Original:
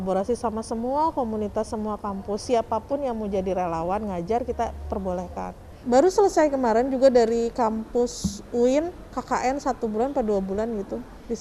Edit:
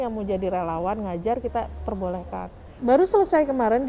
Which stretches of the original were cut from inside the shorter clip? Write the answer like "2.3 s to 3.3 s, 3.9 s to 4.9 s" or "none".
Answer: none